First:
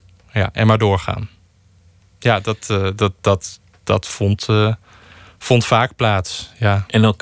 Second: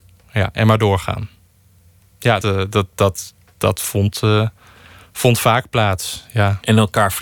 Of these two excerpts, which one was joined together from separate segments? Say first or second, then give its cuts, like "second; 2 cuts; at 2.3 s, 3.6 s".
second; 1 cut; at 2.4 s